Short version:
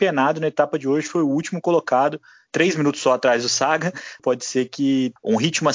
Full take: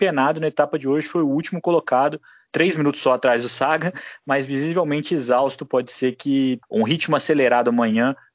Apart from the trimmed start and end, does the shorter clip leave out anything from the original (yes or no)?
yes